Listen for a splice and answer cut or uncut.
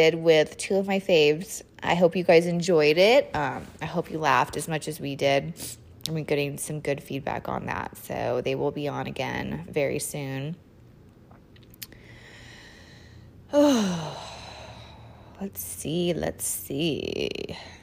uncut